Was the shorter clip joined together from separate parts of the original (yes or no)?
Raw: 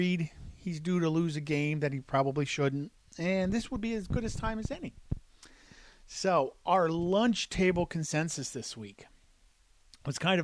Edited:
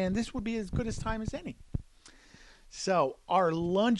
no